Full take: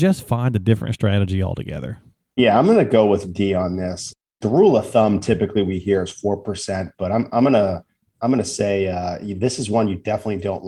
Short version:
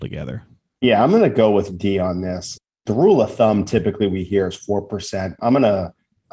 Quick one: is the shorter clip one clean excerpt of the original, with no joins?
no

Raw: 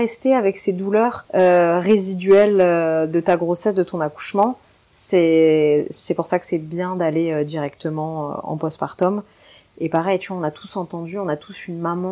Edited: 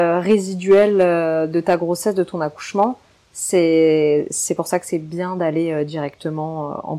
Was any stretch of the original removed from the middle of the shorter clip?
no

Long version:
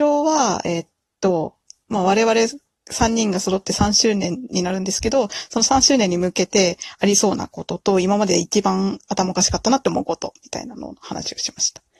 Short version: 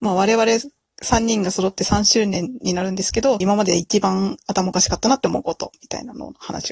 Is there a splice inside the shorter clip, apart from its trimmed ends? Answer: yes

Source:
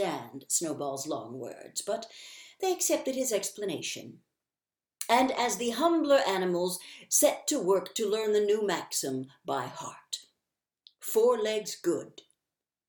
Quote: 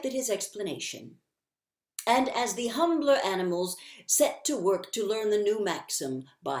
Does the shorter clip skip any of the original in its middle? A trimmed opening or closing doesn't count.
no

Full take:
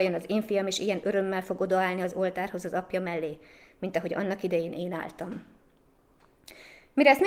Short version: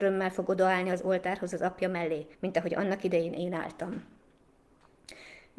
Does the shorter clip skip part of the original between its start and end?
yes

